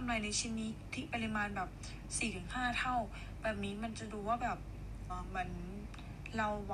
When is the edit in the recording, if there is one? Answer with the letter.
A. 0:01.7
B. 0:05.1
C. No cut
B